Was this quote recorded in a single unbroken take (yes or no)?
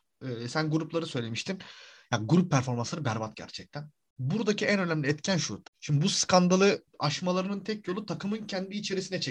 no